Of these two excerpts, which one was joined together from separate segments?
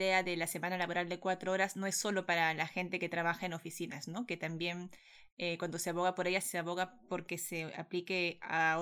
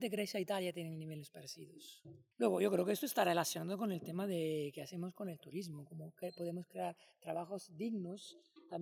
second; 1 cut; at 2.3 s

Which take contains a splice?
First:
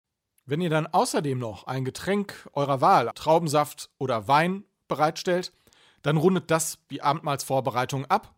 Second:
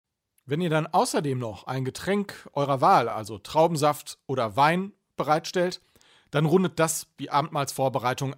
first; 1 cut; at 3.1 s

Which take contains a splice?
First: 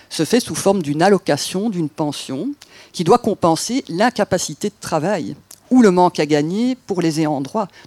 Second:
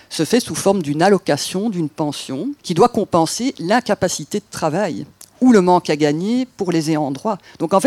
second; 1 cut; at 2.6 s

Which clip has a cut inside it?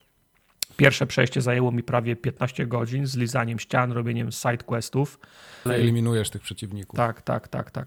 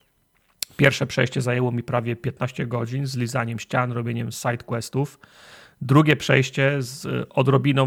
first; 1 cut; at 5.7 s

